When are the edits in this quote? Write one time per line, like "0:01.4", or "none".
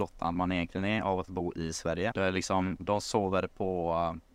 0:02.1